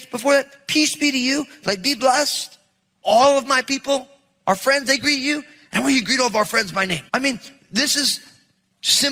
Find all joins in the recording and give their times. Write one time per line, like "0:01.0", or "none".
0:07.1